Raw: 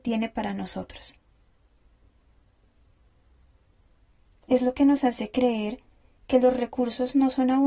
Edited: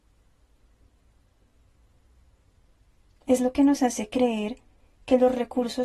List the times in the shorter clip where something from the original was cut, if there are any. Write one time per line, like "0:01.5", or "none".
none

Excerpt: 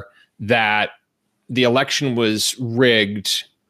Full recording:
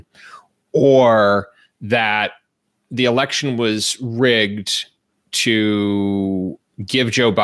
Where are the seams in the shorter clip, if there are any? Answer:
none

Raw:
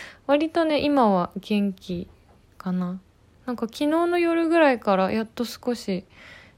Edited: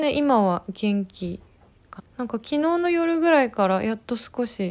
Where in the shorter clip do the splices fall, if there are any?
0:02.0

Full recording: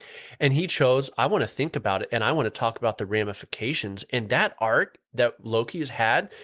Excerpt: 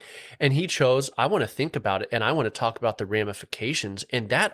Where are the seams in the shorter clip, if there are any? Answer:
none

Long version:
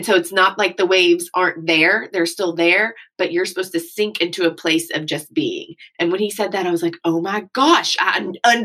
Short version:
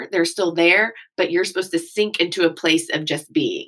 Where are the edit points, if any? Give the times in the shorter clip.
none

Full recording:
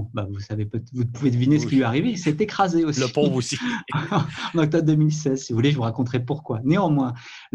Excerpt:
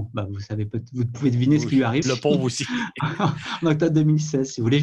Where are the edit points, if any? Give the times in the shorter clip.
0:02.0

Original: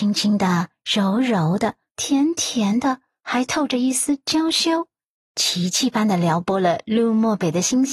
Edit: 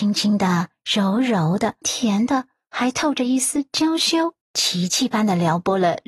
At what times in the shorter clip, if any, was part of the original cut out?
0:01.8
0:04.4

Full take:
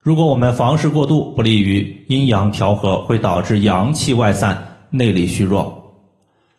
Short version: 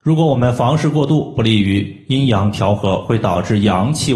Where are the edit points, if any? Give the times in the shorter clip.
none

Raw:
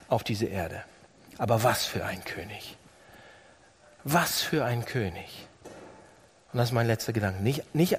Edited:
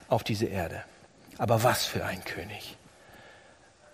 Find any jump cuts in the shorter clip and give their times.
none

